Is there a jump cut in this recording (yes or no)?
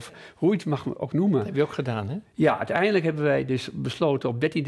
no